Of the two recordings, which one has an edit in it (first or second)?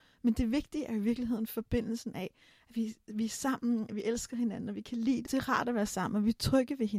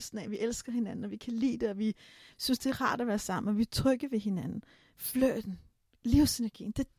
first